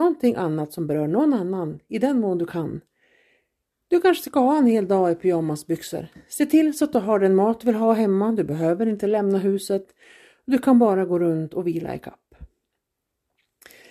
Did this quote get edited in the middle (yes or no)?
no